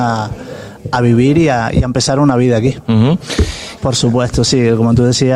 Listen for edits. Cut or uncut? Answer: cut